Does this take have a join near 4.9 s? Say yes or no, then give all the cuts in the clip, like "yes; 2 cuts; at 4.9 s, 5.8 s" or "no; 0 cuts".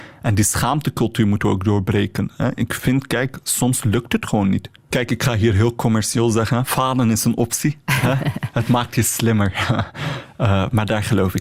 yes; 1 cut; at 4.9 s